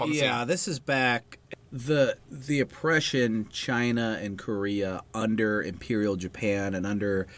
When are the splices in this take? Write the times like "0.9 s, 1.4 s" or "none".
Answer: 2.2 s